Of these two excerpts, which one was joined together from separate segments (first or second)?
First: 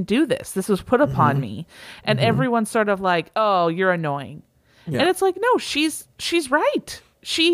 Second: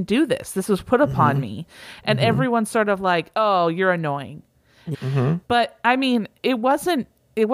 second